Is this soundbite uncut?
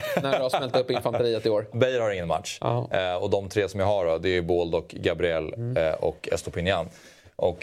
no; 1 cut; at 1.7 s

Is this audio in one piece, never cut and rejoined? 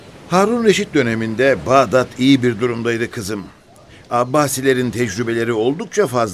yes; 0 cuts

